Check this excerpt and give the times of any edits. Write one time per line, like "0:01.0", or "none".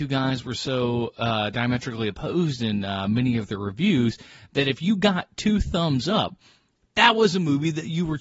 none

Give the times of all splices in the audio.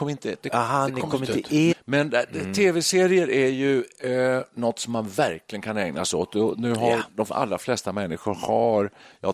0:01.7

